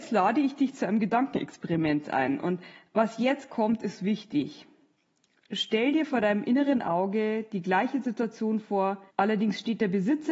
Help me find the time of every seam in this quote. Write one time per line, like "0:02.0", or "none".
0:09.1